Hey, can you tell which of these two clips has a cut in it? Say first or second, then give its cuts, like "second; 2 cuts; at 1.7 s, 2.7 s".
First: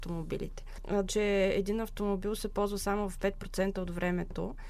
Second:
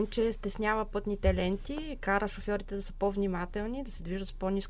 first; 1 cut; at 1.0 s